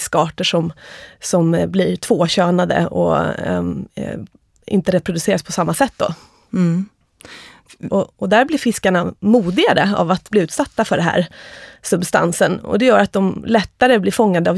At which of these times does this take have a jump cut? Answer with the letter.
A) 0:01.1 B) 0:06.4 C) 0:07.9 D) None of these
C